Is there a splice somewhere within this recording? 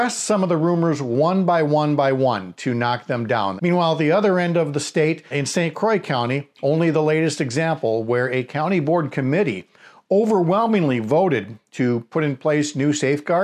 yes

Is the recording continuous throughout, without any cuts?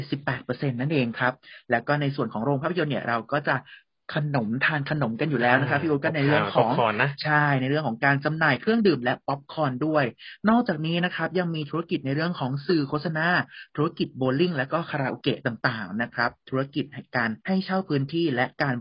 no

